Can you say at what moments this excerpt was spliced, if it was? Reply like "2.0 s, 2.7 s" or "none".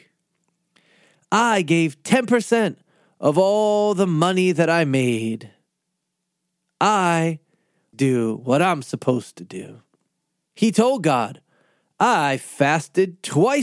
7.9 s, 10.5 s